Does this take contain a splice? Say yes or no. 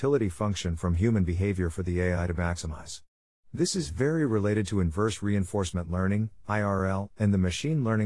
no